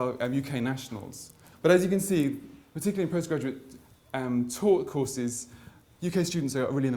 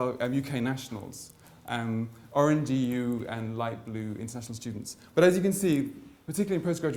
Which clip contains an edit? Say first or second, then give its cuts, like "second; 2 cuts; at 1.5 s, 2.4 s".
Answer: first; 1 cut; at 1.5 s